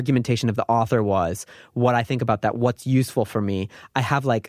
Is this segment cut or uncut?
uncut